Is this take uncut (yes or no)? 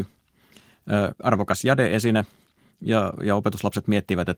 yes